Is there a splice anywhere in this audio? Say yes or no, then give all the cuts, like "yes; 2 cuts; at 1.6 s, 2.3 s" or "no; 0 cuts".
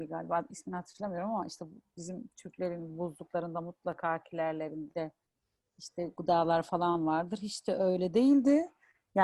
no; 0 cuts